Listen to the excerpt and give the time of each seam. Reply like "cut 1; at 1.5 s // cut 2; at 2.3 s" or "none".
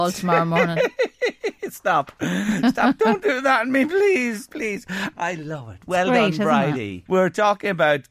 cut 1; at 5.1 s // cut 2; at 7.1 s